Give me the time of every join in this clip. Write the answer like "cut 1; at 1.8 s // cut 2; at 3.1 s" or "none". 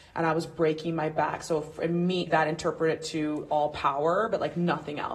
cut 1; at 2.3 s